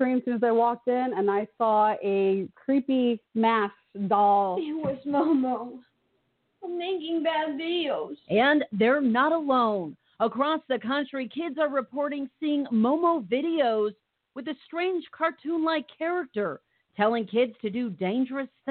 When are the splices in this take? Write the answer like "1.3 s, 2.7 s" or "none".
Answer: none